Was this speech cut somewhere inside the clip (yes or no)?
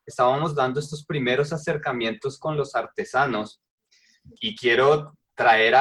no